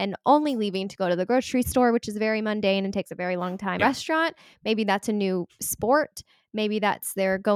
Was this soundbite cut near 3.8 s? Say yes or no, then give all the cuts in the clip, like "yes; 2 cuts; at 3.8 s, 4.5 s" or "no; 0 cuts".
yes; 1 cut; at 3.8 s